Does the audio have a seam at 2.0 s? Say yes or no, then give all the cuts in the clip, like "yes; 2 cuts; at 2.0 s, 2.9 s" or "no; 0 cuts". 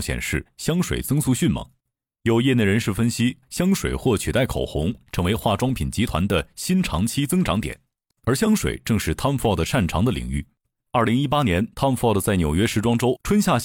no; 1 cut; at 3.4 s